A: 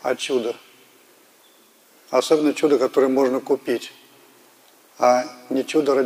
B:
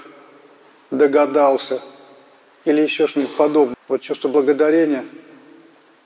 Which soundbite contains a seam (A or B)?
B